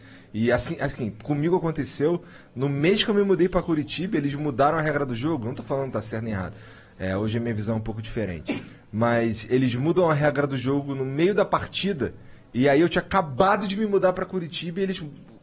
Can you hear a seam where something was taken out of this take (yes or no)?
no